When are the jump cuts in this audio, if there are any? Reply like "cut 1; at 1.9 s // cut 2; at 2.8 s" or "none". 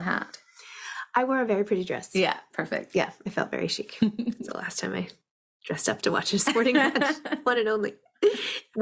cut 1; at 4.5 s